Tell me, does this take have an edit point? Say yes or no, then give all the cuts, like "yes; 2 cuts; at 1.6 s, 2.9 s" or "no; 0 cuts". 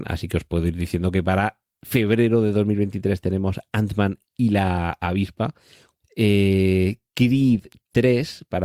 yes; 1 cut; at 6.0 s